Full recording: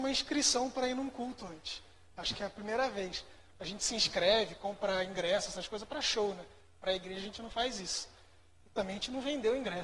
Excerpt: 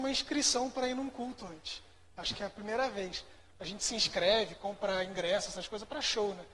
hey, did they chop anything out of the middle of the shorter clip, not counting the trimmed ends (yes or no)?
no